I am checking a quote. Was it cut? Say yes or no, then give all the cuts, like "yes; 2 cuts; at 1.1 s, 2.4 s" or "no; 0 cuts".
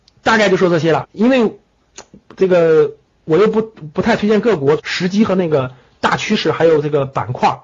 yes; 2 cuts; at 1.0 s, 4.8 s